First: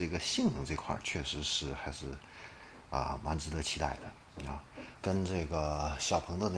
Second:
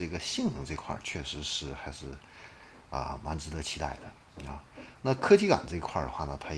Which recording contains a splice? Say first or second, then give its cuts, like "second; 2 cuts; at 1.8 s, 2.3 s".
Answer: first; 1 cut; at 5.0 s